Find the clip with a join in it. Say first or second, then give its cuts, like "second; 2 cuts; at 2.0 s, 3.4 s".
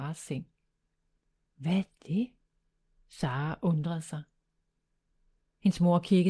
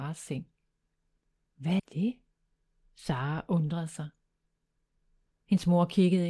second; 1 cut; at 1.8 s